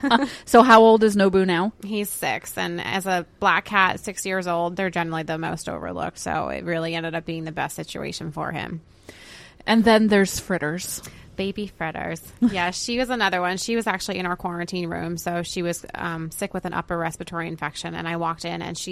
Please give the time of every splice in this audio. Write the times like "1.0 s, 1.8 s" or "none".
none